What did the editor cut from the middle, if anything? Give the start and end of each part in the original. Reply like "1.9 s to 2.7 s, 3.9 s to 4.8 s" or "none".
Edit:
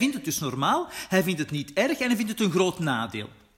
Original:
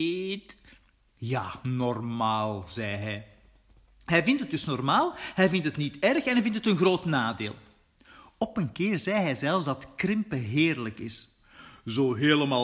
none